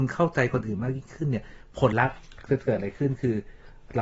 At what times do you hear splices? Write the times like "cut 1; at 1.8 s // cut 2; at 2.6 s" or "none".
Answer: cut 1; at 1.9 s